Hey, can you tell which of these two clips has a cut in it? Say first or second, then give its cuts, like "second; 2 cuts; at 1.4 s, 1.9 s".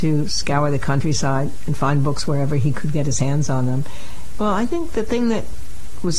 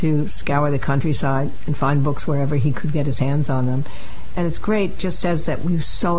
first; 1 cut; at 4.4 s